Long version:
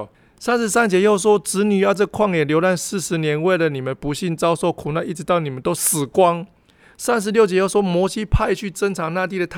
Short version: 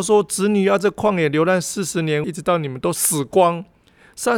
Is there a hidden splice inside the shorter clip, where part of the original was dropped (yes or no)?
yes